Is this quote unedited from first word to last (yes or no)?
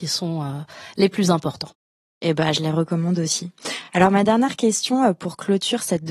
yes